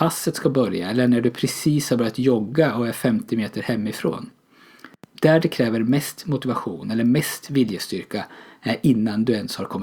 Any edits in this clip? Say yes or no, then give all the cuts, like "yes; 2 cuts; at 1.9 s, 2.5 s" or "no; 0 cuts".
no; 0 cuts